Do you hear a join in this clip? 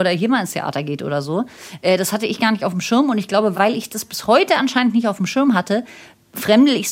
no; 0 cuts

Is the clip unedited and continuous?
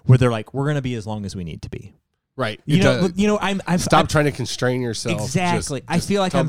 yes; 0 cuts

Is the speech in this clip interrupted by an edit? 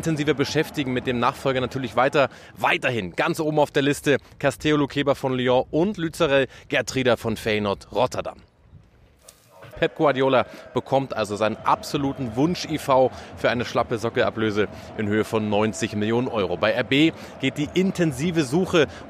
yes; 1 cut; at 9.7 s

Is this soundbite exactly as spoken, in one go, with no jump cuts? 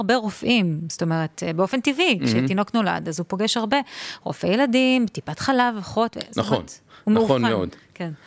yes; 0 cuts

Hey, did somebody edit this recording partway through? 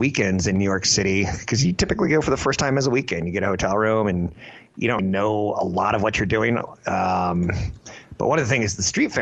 yes; 1 cut; at 5.0 s

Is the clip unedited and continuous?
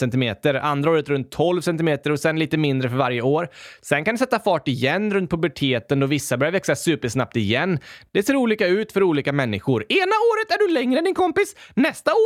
yes; 0 cuts

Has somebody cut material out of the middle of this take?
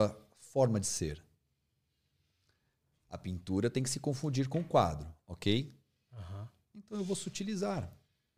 no; 0 cuts

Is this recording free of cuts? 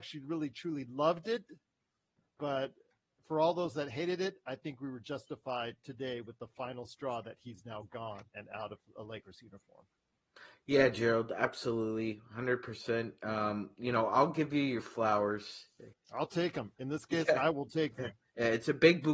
no; 1 cut; at 15.9 s

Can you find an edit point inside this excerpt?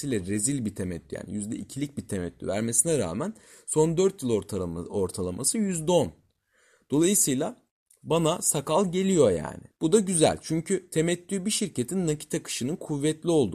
yes; 1 cut; at 9.7 s

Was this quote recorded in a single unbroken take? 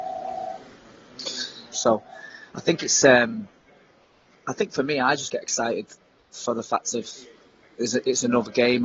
no; 1 cut; at 1.7 s

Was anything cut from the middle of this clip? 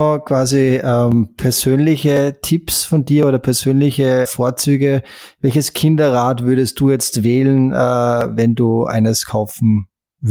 yes; 1 cut; at 4.3 s

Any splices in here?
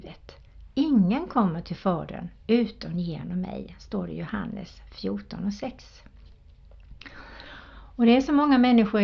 no; 0 cuts

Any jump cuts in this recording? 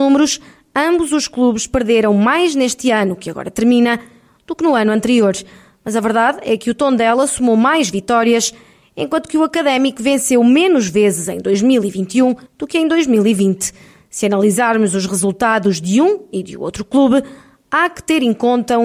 yes; 1 cut; at 12.5 s

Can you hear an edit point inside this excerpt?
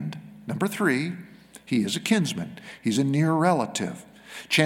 no; 0 cuts

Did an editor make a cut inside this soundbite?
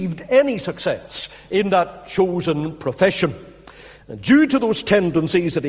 yes; 1 cut; at 4.0 s

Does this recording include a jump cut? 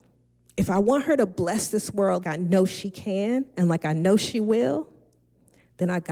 yes; 1 cut; at 2.2 s

